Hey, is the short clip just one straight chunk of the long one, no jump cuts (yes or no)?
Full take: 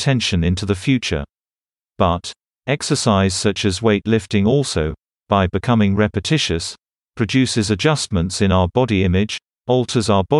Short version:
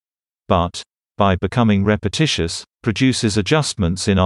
no